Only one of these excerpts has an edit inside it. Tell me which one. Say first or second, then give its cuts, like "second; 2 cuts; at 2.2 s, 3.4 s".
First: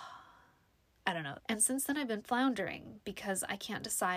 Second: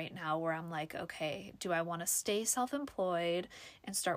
first; 1 cut; at 1.4 s